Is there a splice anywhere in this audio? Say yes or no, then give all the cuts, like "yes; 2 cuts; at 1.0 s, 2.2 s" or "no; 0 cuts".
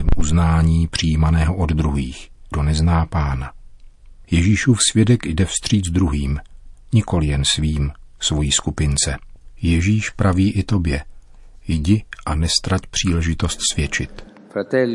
yes; 1 cut; at 2.5 s